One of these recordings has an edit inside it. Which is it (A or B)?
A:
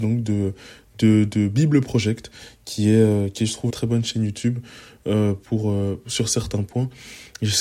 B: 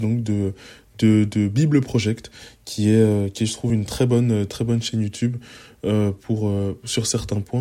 A